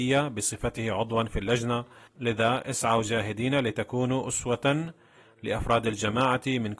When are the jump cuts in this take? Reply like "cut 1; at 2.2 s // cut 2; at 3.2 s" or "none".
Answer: cut 1; at 2.1 s